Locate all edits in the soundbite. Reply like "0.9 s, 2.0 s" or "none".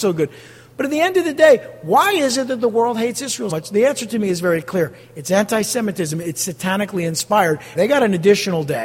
3.5 s, 7.7 s